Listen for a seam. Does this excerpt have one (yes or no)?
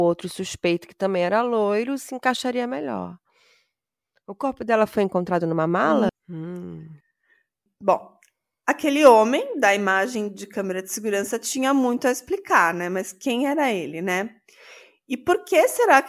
yes